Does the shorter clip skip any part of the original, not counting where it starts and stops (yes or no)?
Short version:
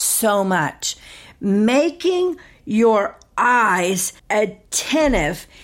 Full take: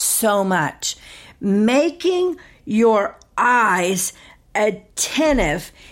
yes